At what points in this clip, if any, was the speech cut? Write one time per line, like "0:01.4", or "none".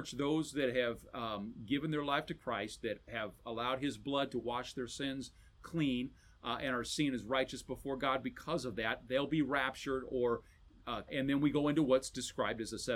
0:11.1